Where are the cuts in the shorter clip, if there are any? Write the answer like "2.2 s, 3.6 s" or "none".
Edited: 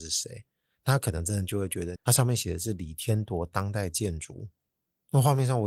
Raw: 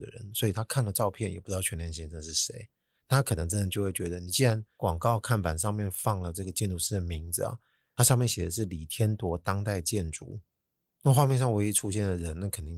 2.0 s